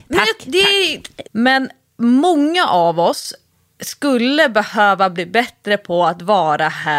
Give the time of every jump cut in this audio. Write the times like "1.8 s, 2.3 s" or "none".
1.3 s

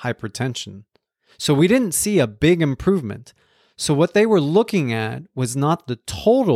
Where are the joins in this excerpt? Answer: none

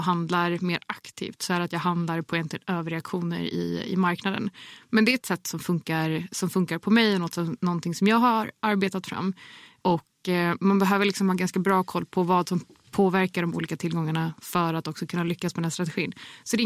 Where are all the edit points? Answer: none

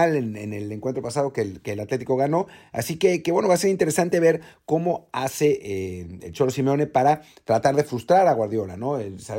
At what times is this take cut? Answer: none

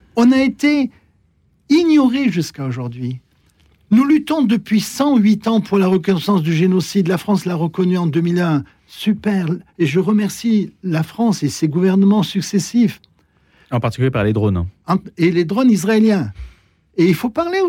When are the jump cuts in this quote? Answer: 13.6 s

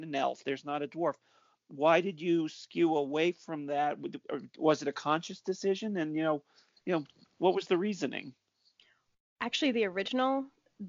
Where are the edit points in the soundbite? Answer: none

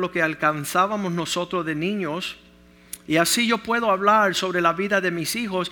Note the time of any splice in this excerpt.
3.1 s

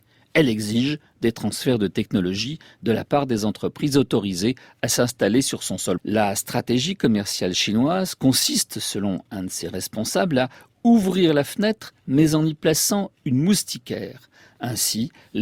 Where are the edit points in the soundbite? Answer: 6.0 s

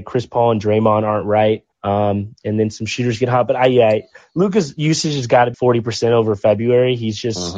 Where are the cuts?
1.7 s, 5.5 s

